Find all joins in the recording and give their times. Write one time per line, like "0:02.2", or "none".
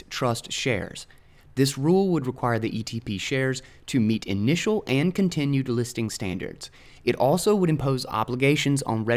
none